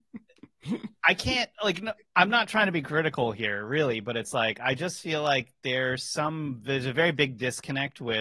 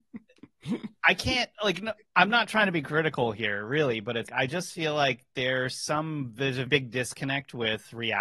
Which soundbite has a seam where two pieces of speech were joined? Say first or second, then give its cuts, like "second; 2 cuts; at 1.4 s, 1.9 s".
second; 2 cuts; at 4.3 s, 6.7 s